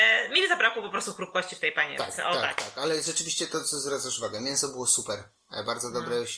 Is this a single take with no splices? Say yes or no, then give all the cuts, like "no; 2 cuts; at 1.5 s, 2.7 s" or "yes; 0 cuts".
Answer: yes; 0 cuts